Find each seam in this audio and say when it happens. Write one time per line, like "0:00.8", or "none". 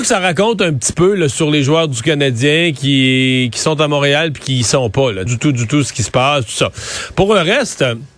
0:05.3